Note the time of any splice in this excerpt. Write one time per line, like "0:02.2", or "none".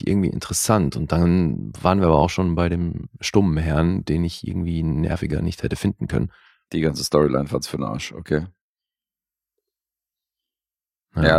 none

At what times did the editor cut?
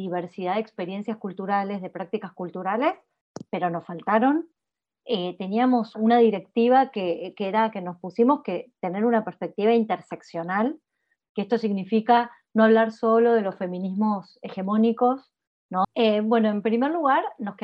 0:05.9
0:15.8

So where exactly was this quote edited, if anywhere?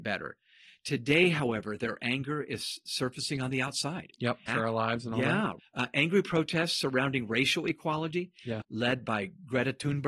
0:04.5
0:05.6
0:08.6

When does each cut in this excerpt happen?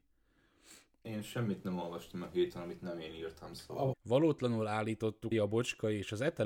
0:01.0
0:03.9
0:05.3

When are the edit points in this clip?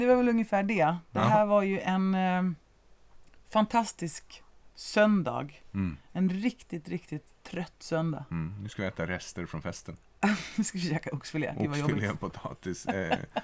none

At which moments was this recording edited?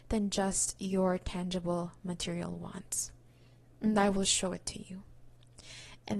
none

